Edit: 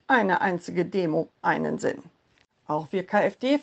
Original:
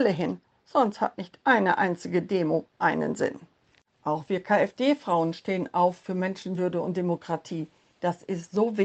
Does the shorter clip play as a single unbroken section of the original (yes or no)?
yes